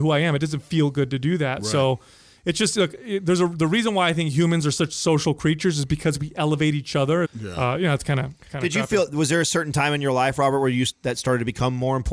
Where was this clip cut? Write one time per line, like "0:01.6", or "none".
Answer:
0:07.2